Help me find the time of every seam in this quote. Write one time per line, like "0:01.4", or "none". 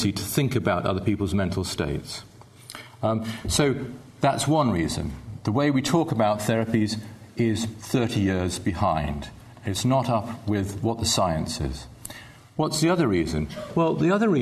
none